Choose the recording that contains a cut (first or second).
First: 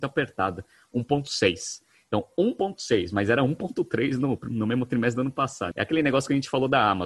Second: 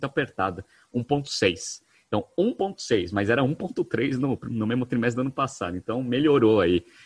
first